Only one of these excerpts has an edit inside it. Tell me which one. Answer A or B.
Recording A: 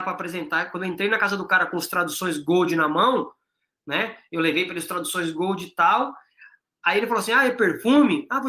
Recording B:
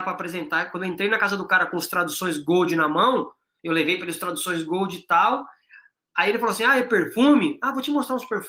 B